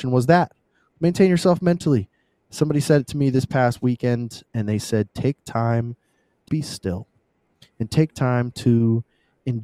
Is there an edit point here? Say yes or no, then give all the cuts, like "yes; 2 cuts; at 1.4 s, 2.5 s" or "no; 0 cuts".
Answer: yes; 1 cut; at 6.5 s